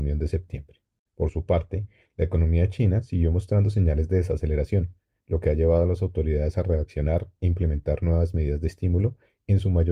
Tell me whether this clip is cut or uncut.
uncut